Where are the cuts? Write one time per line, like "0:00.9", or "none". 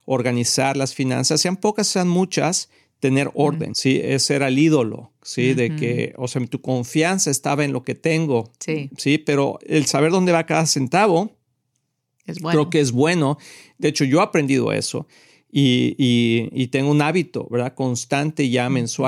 0:03.7

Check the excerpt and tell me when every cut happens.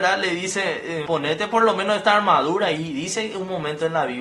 0:01.1

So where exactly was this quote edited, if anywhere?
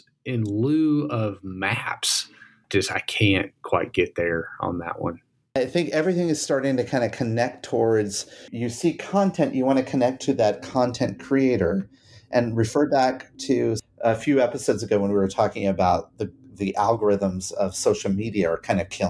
none

